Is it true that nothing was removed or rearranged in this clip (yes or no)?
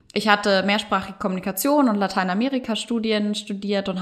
yes